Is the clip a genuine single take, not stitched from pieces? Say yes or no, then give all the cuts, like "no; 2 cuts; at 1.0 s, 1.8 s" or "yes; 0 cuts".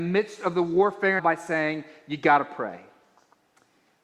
no; 1 cut; at 1.2 s